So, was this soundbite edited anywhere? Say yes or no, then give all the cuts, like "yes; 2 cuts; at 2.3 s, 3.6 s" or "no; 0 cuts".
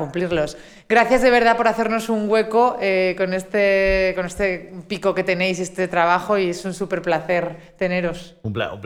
no; 0 cuts